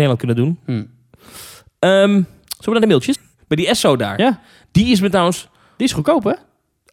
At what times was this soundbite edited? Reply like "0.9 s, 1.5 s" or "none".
3.1 s